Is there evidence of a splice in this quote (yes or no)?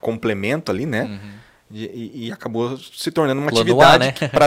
no